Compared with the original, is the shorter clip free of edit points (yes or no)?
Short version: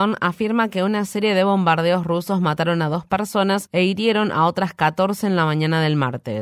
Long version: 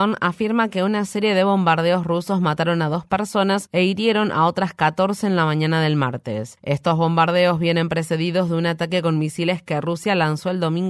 yes